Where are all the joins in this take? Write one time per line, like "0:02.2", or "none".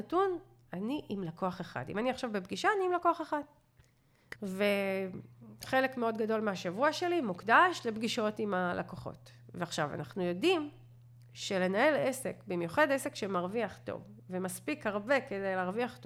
0:04.4